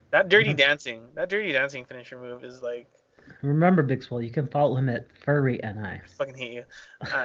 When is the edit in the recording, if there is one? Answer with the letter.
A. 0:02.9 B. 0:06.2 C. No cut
C